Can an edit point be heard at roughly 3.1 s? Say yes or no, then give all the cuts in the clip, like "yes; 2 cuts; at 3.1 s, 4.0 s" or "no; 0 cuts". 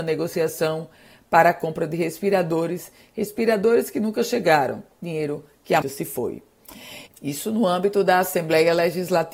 no; 2 cuts; at 5.8 s, 7.1 s